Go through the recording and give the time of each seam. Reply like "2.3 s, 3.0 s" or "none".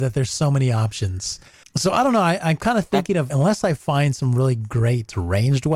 1.6 s, 3.3 s